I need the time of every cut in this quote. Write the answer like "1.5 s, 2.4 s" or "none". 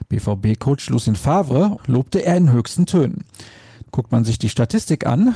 1.8 s, 3.8 s